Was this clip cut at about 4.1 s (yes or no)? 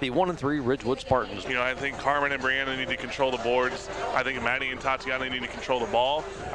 no